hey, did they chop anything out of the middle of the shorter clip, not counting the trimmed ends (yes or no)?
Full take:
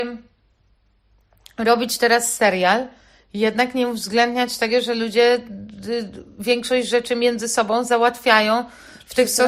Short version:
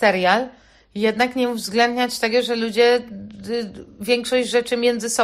no